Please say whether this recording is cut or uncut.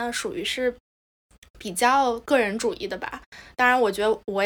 uncut